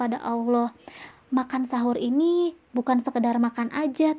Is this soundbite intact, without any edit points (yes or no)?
no